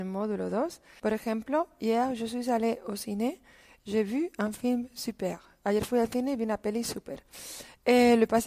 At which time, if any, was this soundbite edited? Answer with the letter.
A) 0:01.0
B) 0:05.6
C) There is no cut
A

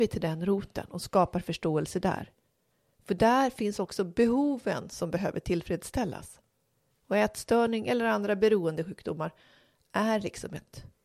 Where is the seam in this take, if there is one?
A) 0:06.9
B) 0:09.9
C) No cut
A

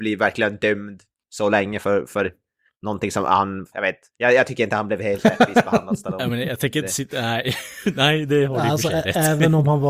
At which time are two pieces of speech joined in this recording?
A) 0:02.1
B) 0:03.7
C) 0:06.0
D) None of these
B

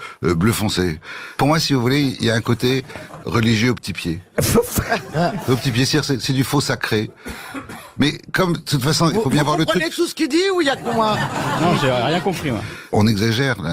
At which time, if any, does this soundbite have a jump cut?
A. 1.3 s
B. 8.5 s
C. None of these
C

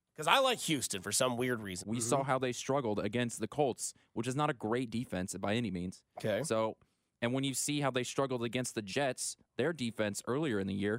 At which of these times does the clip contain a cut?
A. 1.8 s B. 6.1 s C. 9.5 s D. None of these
A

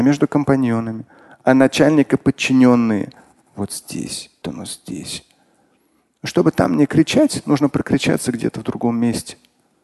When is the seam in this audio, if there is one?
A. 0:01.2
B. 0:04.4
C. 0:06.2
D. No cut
B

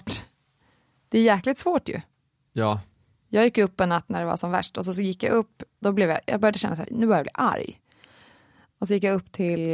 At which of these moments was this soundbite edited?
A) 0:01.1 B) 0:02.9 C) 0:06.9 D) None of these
C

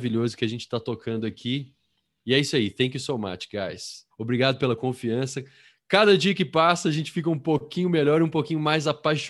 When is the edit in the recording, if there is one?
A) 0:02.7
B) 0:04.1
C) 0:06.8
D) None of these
B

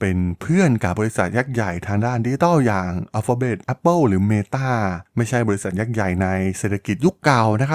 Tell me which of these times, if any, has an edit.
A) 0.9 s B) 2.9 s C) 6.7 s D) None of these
A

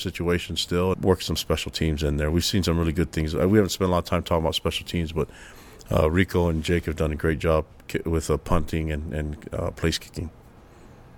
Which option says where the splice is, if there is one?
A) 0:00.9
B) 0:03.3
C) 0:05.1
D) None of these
A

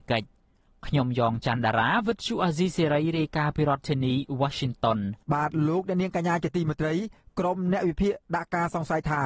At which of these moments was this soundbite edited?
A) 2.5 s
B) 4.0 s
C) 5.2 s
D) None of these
C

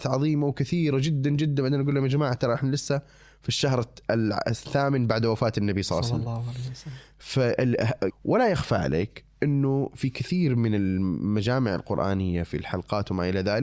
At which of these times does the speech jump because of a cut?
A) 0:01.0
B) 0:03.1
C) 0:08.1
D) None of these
C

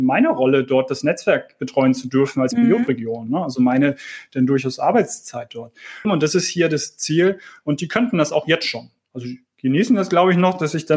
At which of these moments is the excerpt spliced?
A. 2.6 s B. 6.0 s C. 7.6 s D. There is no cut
B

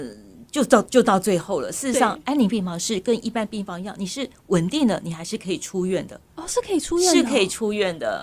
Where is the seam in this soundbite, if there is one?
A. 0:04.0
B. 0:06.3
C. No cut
C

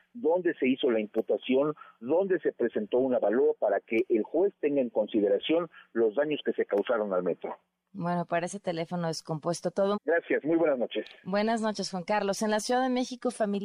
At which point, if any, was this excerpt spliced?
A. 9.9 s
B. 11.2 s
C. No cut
A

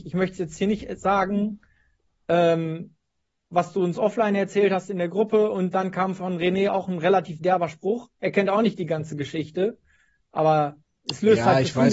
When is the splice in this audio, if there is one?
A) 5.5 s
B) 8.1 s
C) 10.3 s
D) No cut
D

